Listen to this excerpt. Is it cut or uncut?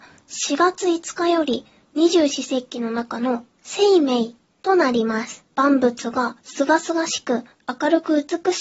cut